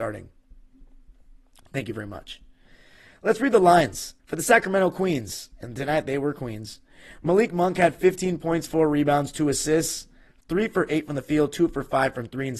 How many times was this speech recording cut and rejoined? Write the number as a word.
one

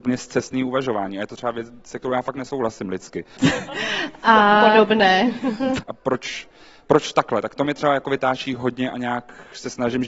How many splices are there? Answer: two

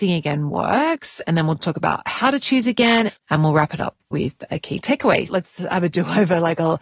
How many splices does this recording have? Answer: two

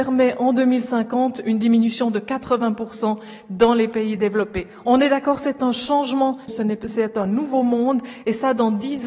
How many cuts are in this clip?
one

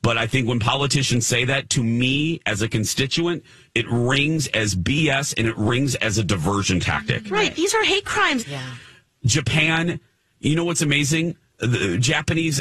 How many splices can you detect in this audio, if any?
one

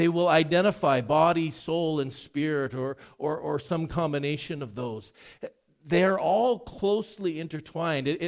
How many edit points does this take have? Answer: zero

